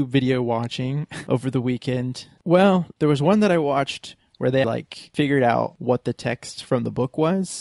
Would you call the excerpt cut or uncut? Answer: cut